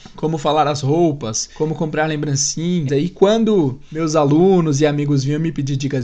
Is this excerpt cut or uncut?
cut